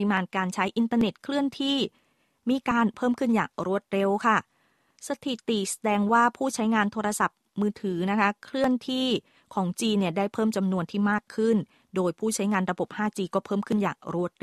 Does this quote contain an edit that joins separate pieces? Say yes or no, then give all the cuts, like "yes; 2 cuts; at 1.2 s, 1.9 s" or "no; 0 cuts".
no; 0 cuts